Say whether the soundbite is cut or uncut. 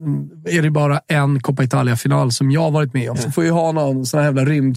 cut